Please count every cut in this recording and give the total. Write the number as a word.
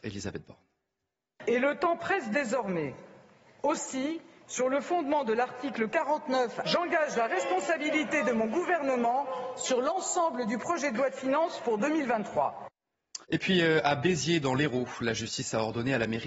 three